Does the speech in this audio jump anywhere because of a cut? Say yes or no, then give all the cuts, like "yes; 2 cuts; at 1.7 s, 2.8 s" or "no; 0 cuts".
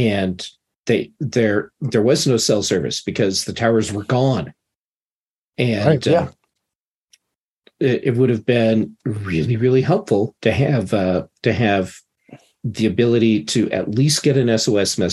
yes; 1 cut; at 10.4 s